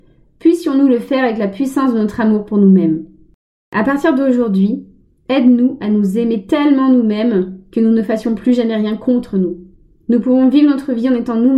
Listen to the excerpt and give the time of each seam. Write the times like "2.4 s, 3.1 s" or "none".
none